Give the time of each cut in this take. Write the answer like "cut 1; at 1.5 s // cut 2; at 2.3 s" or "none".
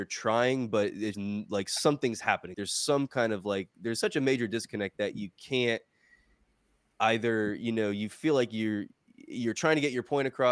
cut 1; at 1.1 s // cut 2; at 2.5 s